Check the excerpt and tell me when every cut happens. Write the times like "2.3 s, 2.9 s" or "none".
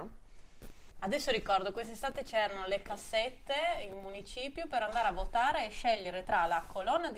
0.9 s